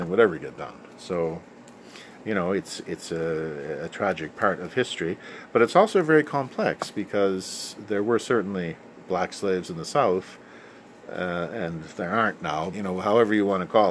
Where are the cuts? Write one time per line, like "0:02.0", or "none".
0:12.7